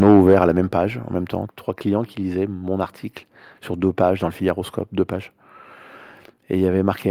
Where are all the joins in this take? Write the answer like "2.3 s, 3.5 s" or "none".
1.5 s